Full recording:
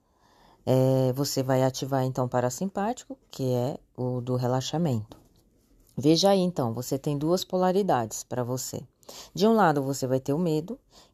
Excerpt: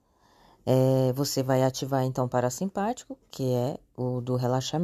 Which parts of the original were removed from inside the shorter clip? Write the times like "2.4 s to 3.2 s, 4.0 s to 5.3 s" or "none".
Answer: none